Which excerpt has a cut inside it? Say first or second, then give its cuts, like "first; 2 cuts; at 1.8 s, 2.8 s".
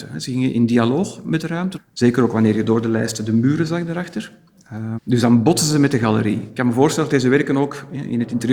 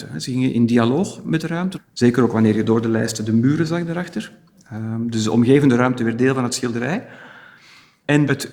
first; 1 cut; at 5.0 s